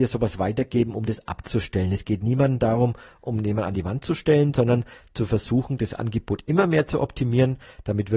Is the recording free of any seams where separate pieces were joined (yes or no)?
yes